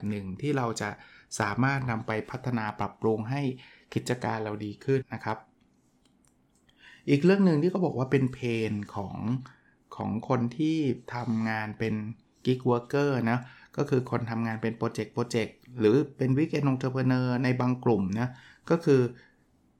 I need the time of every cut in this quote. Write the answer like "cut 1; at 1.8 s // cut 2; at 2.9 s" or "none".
cut 1; at 5.0 s

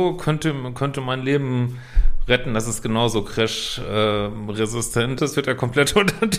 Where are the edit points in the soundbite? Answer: cut 1; at 5.2 s

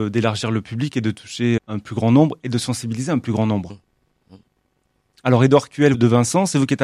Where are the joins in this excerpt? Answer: cut 1; at 1.6 s // cut 2; at 3.7 s // cut 3; at 5.9 s

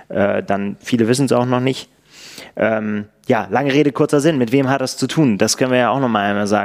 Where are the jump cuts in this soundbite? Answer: none

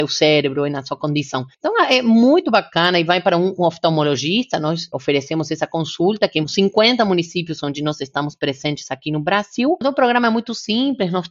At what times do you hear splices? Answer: cut 1; at 1.5 s // cut 2; at 9.8 s

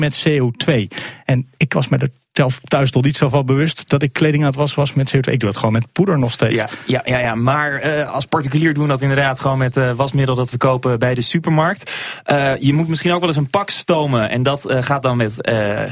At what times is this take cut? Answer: none

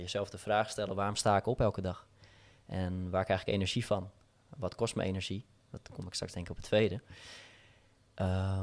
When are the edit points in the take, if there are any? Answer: none

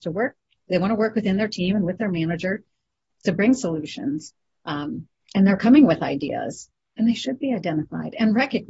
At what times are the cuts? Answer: none

